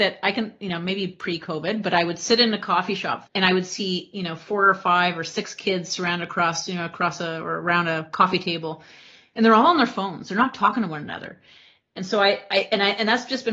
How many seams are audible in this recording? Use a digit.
1